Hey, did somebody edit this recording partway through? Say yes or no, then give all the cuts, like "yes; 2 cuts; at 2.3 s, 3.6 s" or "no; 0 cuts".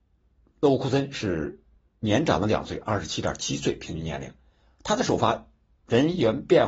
no; 0 cuts